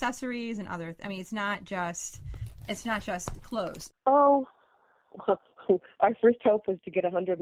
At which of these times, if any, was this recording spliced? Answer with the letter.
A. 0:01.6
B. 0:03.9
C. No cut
B